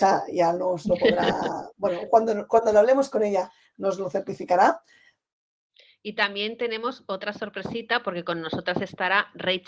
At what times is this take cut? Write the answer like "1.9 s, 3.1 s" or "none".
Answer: none